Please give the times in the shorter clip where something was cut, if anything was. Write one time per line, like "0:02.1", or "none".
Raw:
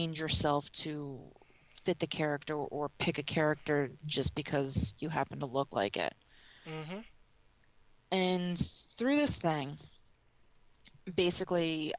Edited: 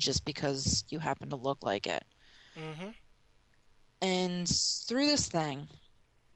none

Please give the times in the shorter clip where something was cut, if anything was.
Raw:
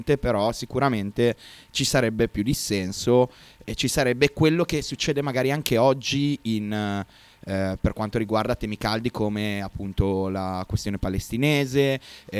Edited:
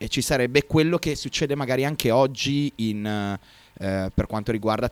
none

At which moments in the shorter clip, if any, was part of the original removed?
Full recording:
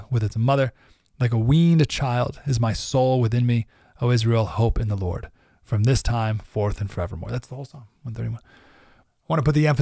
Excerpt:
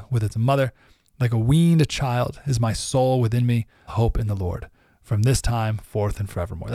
0:03.9

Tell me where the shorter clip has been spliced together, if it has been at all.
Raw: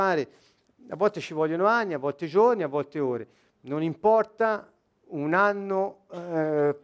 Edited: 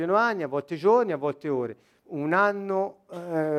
0:02.0

